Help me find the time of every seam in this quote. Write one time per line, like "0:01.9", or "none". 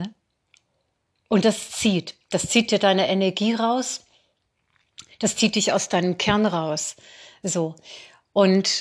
none

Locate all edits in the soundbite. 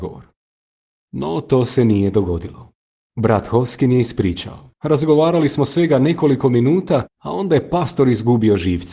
0:04.7

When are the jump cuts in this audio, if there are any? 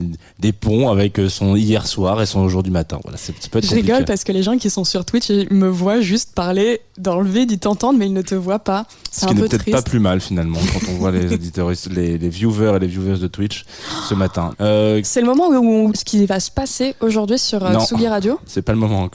0:14.5
0:15.9

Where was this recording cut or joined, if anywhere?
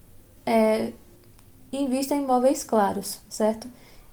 none

